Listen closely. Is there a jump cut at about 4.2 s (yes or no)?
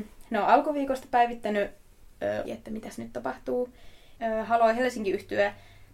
yes